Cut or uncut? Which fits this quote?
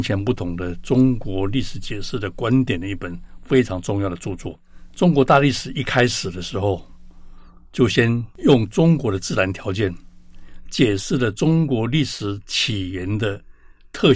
uncut